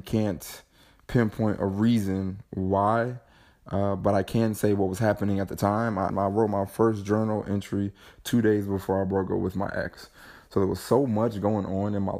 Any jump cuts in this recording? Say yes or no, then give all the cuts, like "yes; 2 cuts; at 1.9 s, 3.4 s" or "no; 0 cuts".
yes; 1 cut; at 6.1 s